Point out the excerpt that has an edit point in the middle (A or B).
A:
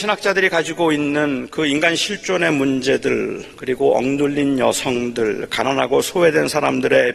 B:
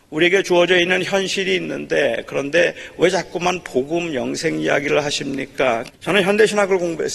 B